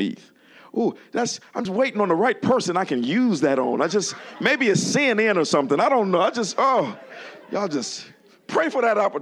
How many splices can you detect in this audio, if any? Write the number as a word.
one